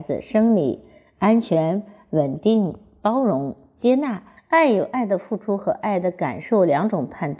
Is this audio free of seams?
no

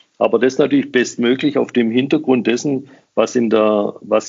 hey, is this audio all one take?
yes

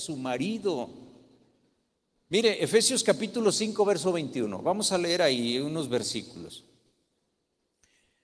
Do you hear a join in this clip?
no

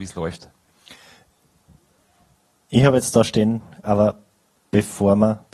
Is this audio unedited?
no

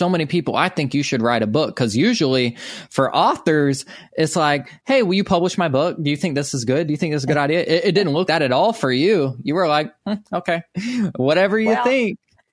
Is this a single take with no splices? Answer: no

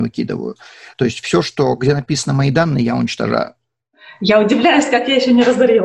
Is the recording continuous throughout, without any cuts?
yes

